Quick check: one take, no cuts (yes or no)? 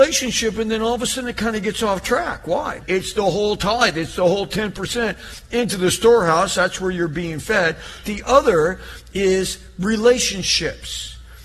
no